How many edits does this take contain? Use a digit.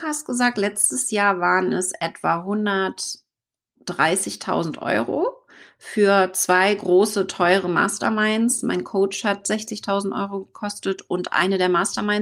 0